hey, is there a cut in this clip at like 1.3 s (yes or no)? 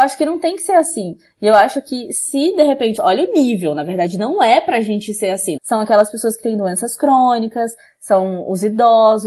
no